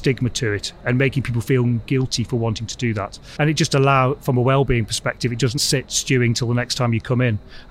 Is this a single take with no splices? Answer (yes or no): no